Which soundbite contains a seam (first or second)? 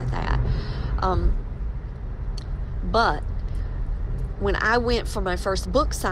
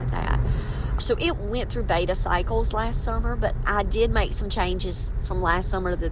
second